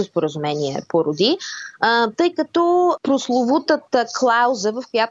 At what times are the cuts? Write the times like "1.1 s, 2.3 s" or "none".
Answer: none